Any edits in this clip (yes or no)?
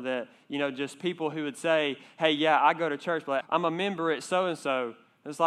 yes